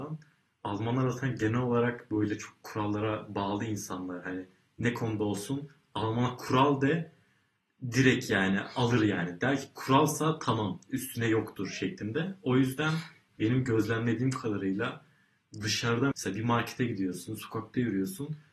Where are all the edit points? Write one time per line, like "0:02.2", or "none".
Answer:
0:16.1